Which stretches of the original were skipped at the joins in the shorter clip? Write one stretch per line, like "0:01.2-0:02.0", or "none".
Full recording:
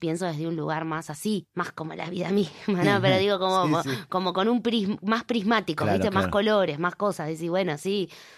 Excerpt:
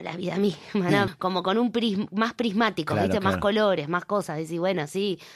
0:03.0-0:04.0